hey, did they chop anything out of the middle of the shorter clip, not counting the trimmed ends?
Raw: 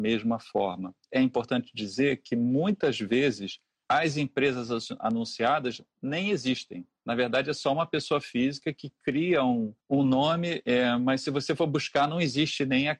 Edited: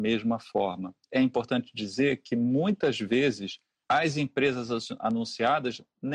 no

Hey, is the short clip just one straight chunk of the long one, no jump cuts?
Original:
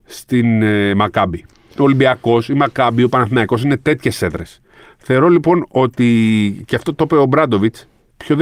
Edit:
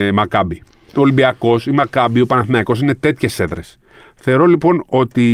yes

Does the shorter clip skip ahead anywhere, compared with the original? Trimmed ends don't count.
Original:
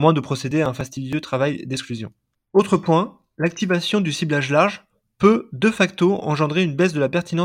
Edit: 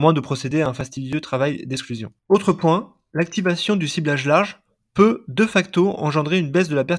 yes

